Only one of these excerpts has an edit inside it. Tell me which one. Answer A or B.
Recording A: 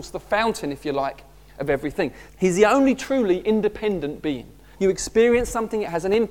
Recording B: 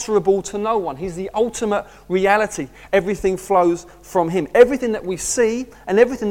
A